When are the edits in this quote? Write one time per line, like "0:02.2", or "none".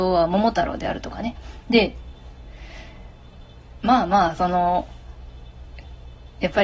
0:01.7

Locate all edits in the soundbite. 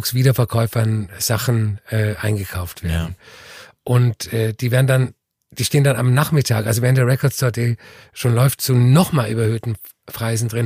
none

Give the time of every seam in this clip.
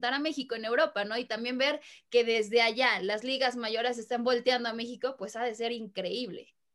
none

